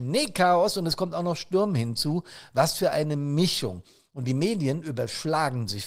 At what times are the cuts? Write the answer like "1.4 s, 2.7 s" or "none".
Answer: none